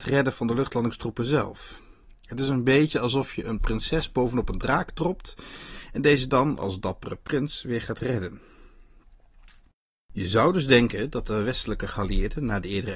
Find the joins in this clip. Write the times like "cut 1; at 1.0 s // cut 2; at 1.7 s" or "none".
none